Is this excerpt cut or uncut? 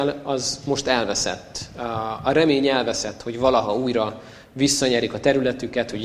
uncut